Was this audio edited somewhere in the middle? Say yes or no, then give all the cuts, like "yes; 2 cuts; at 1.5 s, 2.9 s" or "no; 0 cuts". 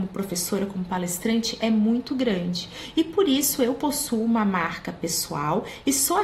no; 0 cuts